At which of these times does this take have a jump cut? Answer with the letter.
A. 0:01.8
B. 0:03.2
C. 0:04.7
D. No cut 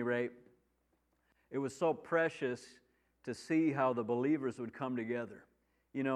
D